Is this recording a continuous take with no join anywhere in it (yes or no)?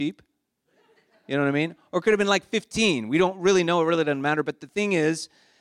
yes